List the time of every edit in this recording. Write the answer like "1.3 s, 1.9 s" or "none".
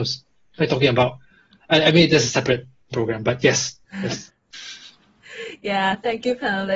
none